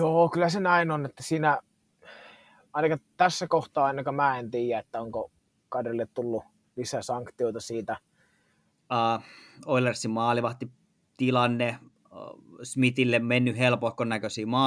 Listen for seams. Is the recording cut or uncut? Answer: cut